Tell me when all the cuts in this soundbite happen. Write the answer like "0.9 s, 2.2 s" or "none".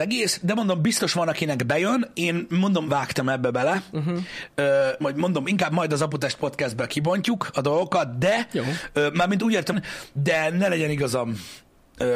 2.9 s, 5.0 s, 9.7 s